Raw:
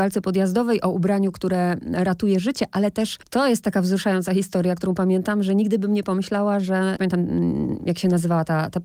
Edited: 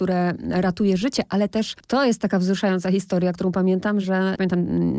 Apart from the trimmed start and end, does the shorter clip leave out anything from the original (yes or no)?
yes